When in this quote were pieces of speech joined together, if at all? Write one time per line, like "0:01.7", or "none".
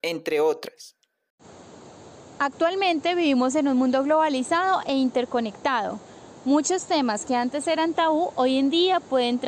none